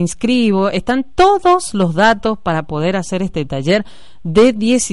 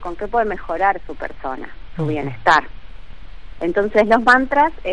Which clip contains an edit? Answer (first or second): second